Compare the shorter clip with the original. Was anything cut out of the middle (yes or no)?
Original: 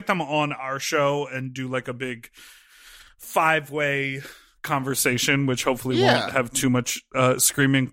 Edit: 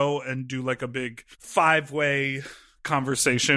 yes